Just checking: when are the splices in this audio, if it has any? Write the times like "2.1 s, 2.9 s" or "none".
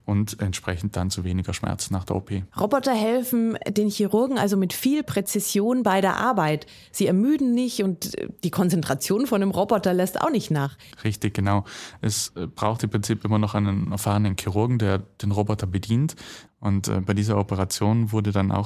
2.5 s, 10.9 s, 16.5 s